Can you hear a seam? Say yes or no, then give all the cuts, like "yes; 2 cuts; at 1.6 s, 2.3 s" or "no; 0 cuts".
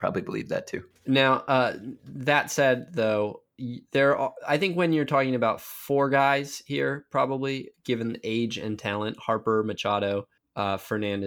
no; 0 cuts